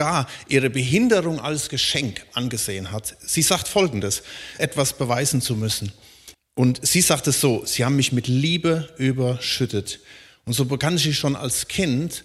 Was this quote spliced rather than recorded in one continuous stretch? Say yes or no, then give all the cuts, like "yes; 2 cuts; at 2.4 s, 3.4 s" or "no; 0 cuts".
yes; 2 cuts; at 4.6 s, 6.3 s